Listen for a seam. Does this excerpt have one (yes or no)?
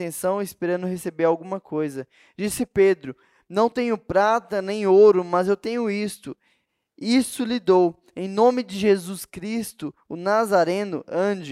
no